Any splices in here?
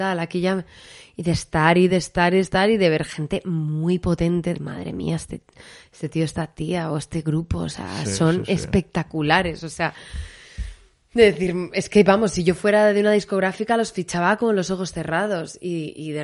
yes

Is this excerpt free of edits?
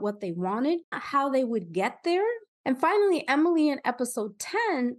no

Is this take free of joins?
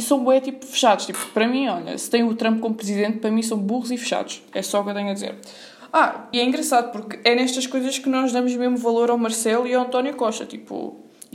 no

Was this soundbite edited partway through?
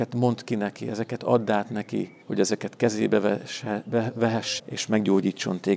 yes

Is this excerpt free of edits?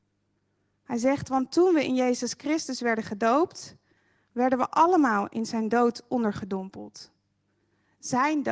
yes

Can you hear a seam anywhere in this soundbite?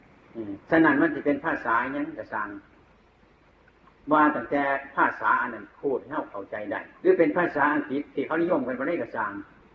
yes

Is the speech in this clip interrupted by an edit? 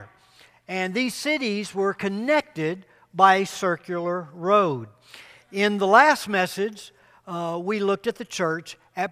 no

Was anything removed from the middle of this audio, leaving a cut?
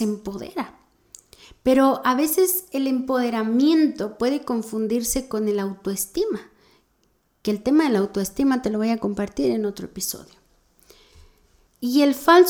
no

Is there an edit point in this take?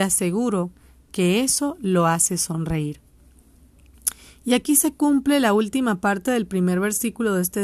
no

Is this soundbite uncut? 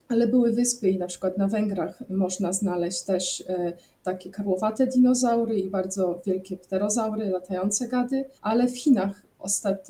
no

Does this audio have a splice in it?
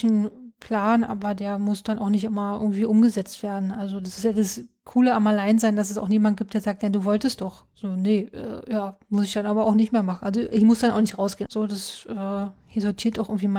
yes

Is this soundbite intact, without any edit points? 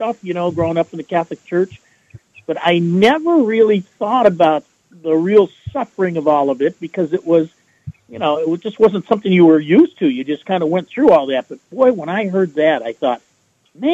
yes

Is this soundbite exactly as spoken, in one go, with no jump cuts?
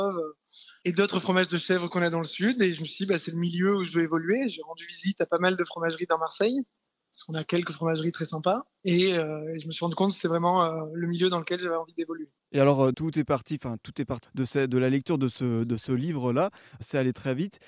no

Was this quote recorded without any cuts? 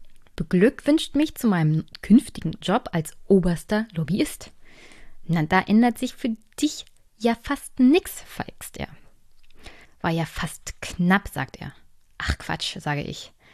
no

